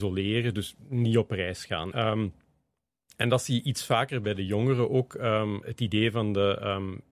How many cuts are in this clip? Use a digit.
1